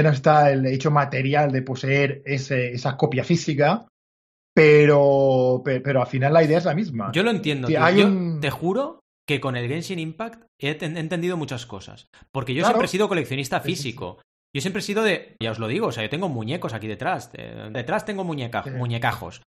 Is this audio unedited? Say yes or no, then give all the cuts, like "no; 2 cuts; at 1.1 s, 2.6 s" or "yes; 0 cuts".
no; 2 cuts; at 15.4 s, 17.7 s